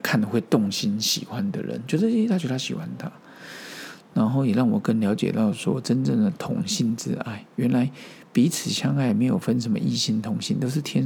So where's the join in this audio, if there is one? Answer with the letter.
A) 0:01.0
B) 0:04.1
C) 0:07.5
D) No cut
C